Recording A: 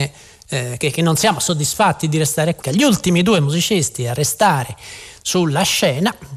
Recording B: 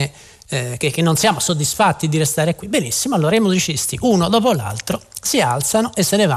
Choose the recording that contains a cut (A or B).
A